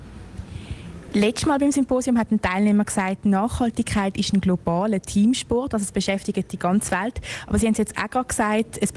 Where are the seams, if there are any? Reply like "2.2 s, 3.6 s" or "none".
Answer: none